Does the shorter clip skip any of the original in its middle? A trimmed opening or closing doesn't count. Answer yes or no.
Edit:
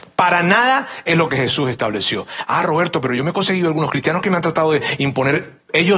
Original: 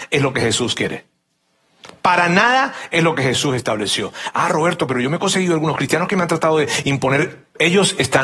no